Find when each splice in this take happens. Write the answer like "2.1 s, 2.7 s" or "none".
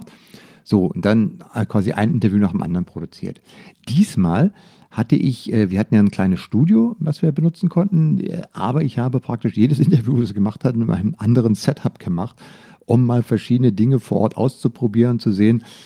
none

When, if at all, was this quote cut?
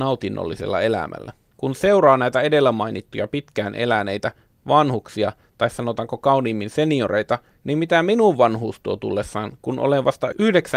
none

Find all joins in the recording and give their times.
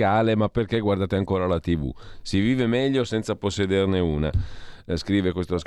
none

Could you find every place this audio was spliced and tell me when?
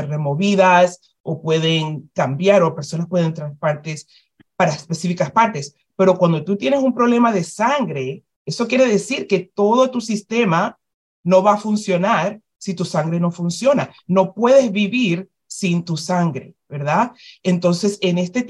none

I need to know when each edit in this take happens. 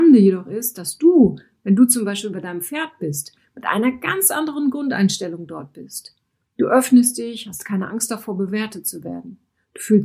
none

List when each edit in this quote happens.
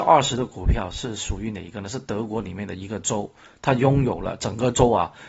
none

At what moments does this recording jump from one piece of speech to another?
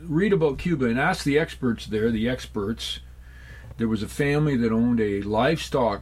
3.7 s

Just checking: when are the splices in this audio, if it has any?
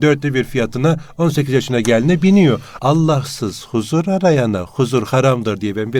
2.8 s

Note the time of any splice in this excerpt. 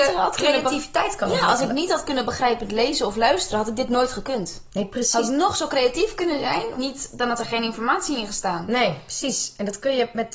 6.7 s

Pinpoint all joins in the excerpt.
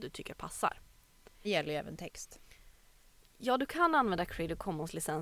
1.4 s

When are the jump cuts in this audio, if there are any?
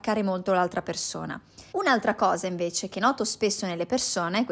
1.7 s

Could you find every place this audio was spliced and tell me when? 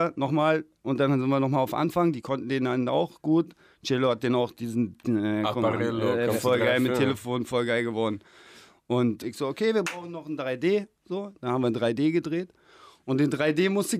9.2 s

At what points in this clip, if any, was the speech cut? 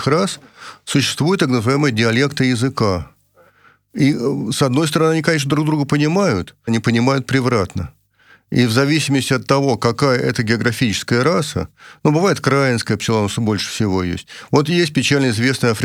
6.7 s

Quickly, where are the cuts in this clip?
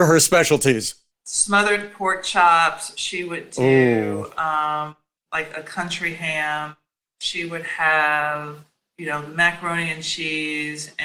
1.1 s

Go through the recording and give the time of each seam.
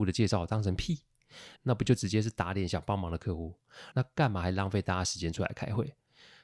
1.6 s, 3.9 s

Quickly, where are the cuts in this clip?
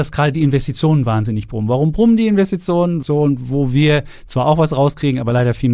3.0 s

